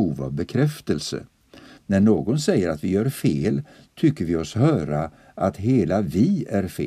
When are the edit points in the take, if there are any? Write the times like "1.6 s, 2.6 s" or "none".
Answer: 1.8 s